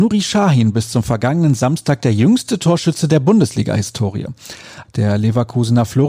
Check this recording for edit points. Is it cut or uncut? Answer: cut